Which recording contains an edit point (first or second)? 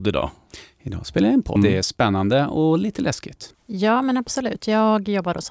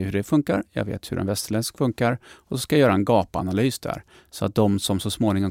first